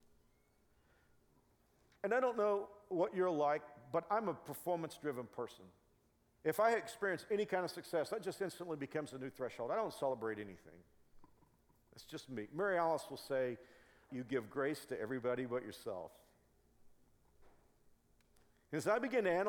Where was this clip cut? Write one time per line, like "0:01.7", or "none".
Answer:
0:14.1